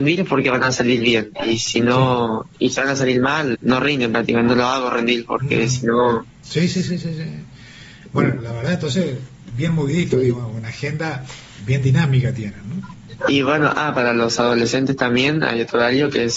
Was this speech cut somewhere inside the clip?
yes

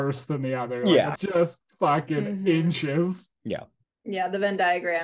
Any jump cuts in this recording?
yes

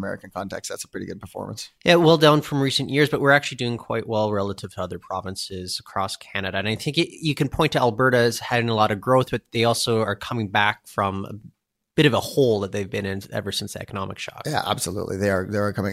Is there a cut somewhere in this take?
no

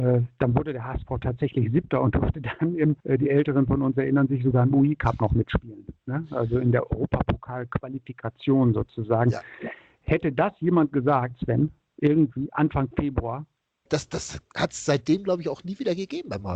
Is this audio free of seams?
no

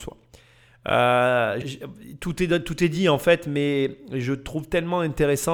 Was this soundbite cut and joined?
yes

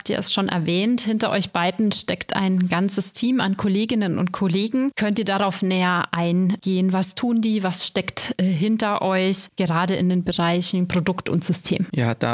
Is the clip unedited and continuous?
yes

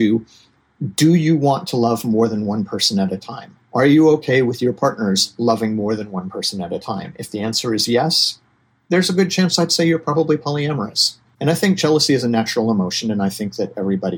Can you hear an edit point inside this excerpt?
yes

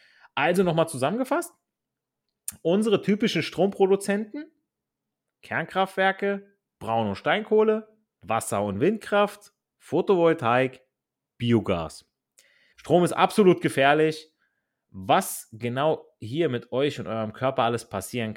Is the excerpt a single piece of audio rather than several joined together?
no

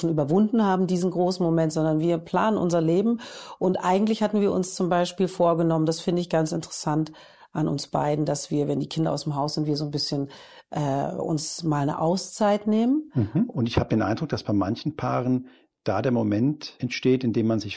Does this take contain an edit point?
yes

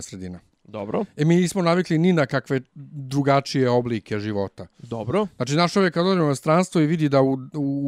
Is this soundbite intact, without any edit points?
yes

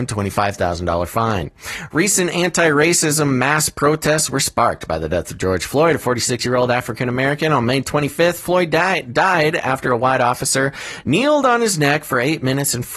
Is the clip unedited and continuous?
yes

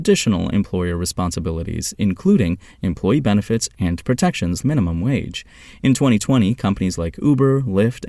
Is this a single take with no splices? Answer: no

